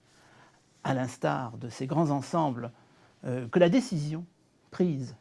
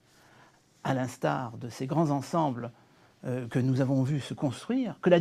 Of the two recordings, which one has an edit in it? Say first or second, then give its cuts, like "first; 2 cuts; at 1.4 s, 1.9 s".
first; 1 cut; at 3.5 s